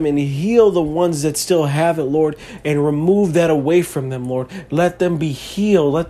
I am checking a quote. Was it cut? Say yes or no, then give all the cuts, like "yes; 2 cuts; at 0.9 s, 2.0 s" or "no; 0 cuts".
yes; 1 cut; at 4.7 s